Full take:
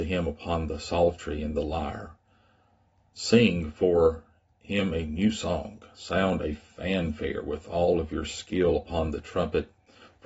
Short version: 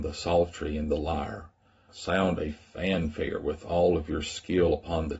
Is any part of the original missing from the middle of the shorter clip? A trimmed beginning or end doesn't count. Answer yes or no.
yes